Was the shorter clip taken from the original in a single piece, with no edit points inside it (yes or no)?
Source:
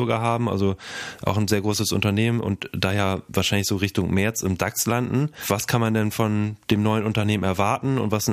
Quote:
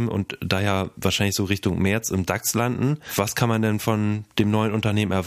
yes